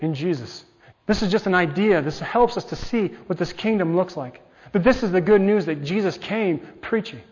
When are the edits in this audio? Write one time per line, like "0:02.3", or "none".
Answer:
0:00.9